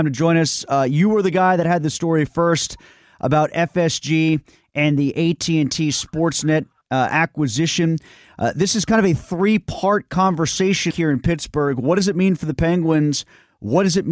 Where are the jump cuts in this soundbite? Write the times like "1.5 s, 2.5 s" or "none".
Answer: 10.9 s